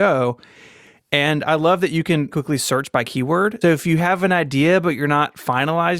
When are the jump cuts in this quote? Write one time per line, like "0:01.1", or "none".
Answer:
0:02.3
0:03.6